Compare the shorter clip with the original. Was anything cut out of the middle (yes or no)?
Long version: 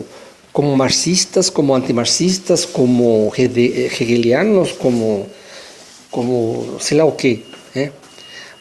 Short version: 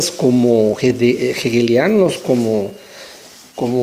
no